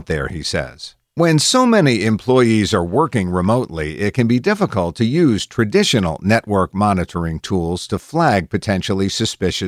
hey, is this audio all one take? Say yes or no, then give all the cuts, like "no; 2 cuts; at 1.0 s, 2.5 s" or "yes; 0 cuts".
no; 1 cut; at 1.0 s